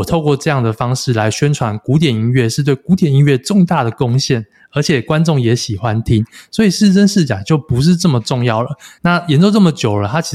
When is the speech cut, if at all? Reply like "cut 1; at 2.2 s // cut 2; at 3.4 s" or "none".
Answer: cut 1; at 9.0 s